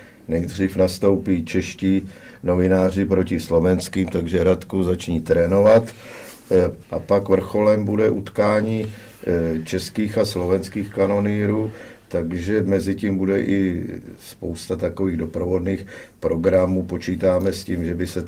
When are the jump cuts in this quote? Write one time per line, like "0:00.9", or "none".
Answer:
0:06.8